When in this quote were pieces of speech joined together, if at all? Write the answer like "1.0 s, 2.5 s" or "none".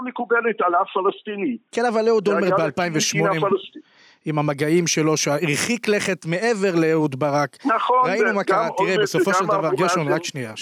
none